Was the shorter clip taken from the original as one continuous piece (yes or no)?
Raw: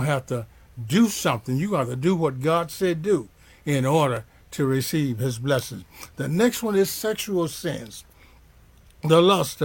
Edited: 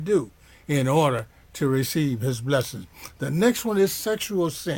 yes